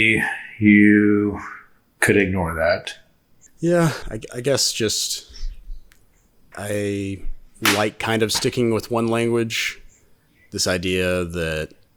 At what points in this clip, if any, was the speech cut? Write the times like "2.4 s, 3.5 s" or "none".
4.0 s, 6.5 s